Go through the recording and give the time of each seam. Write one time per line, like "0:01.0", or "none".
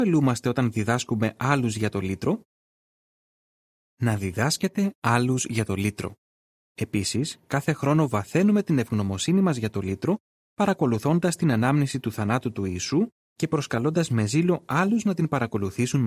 0:06.7

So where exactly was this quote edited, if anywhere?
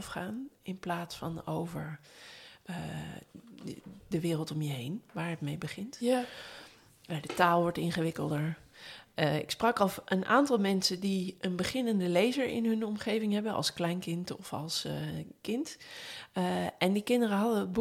0:04.0

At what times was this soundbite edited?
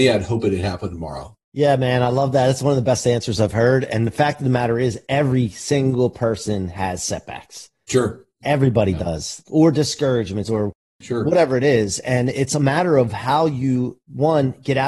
0:10.4

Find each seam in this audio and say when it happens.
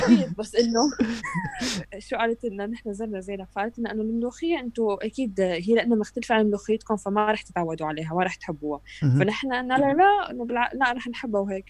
0:01.2

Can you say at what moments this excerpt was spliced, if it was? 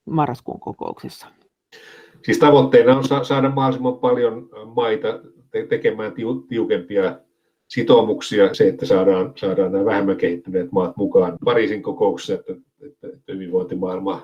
0:08.5
0:11.4

